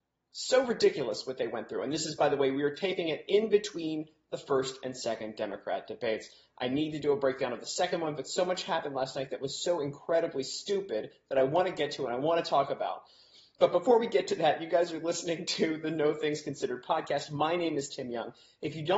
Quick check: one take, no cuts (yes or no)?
yes